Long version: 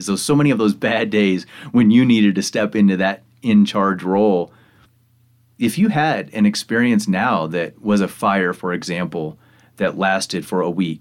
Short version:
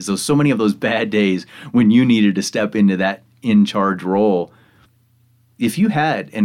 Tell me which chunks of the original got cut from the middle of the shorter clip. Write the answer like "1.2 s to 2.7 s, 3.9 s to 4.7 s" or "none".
none